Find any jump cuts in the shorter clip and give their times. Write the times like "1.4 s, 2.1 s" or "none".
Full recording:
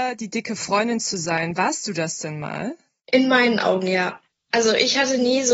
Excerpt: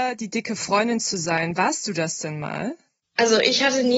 3.0 s